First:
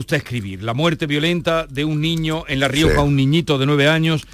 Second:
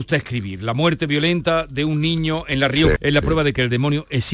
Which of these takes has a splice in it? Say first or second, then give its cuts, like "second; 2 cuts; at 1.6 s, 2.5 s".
second; 1 cut; at 3.0 s